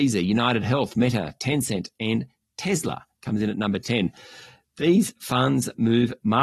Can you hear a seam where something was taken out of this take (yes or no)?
no